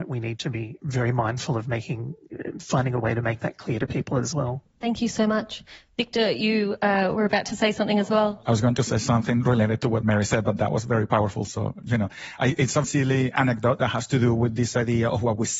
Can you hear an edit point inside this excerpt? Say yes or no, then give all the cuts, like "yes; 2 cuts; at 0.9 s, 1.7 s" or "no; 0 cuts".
yes; 1 cut; at 12.8 s